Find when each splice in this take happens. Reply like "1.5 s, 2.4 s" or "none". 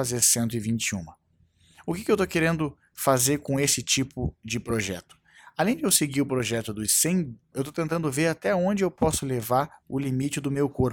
7.5 s